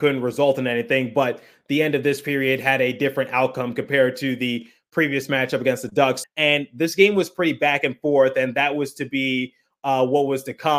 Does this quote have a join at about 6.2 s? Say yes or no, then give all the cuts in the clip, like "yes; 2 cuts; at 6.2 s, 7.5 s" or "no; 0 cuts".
yes; 1 cut; at 6.2 s